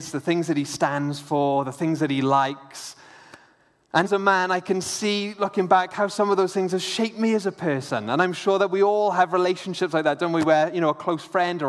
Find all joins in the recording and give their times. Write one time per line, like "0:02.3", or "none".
0:04.0